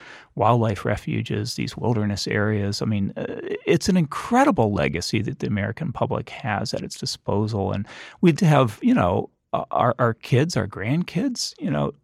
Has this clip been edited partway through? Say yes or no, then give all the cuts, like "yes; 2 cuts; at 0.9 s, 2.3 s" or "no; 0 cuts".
yes; 1 cut; at 8.4 s